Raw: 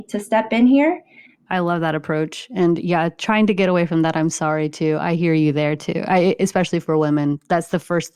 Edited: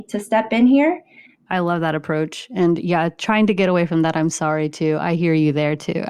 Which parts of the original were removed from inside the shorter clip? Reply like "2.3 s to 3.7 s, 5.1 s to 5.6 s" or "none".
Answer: none